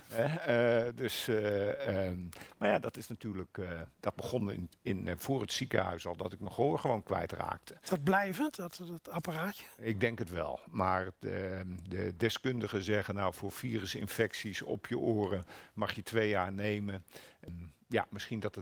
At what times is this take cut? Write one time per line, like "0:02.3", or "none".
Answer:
0:17.5